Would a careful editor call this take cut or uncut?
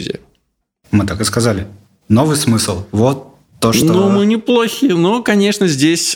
uncut